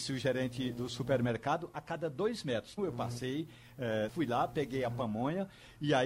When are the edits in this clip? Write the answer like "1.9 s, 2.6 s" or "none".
2.8 s, 4.1 s